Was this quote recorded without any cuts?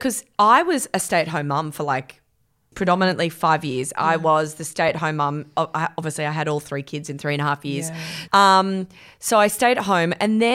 no; 2 cuts; at 2.7 s, 8.3 s

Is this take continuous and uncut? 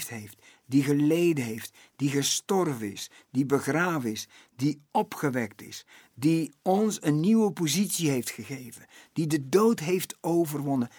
yes; 0 cuts

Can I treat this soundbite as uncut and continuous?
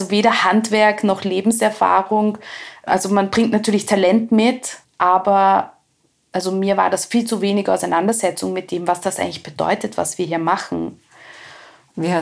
no; 1 cut; at 4.8 s

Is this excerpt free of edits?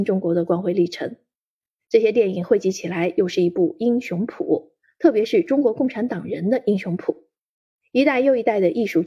yes; 0 cuts

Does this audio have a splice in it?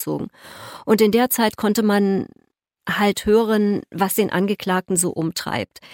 no; 0 cuts

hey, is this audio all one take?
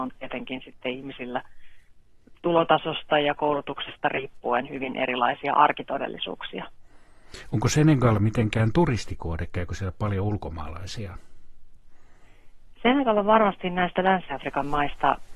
yes; 0 cuts

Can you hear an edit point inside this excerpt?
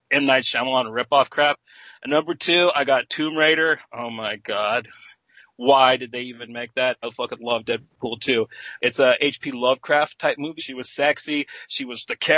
yes; 3 cuts; at 7.0 s, 8.8 s, 10.6 s

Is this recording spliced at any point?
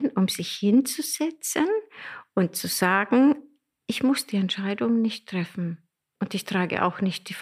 no; 0 cuts

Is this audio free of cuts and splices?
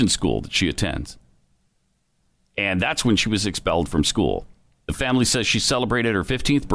no; 1 cut; at 4.8 s

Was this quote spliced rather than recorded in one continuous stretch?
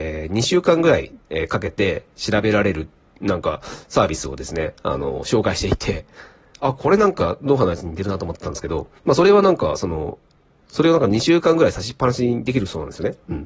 yes; 3 cuts; at 1.2 s, 9.0 s, 10.6 s

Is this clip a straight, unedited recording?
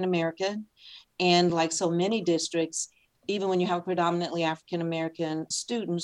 yes; 0 cuts

